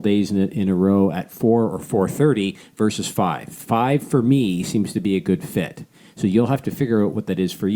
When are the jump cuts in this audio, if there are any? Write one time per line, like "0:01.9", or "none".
none

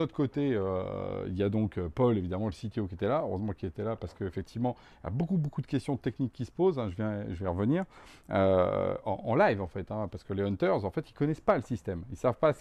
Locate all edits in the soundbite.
none

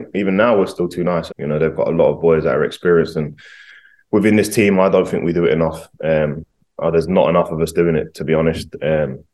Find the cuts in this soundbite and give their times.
0:01.3

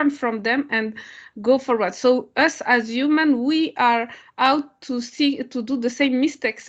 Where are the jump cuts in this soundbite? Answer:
none

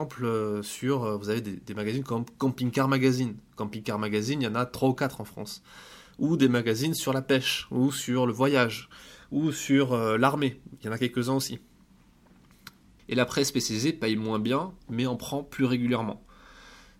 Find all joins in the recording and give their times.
0:13.0

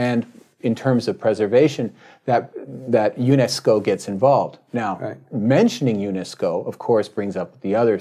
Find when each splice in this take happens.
none

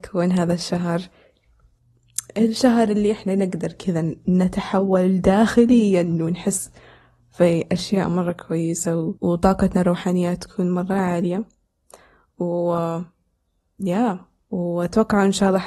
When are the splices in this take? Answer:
0:09.2

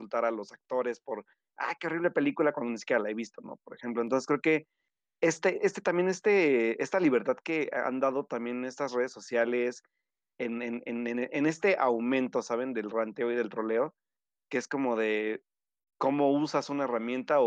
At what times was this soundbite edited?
none

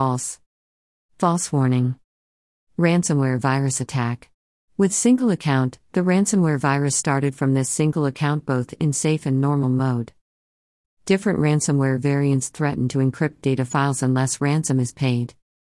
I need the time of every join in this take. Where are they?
0:04.6
0:10.8

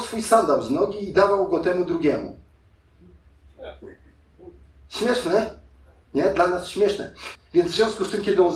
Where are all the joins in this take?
0:07.3

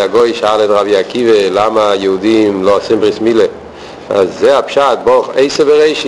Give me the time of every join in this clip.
0:04.1

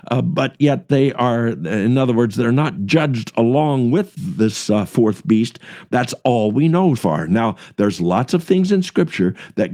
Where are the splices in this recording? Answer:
0:05.9
0:07.0

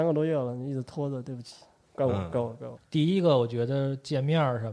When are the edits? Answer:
0:02.8

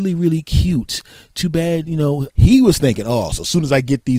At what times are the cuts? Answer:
0:02.3

